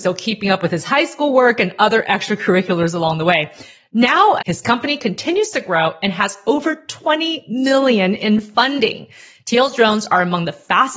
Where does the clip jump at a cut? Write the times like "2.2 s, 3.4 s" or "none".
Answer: 4.4 s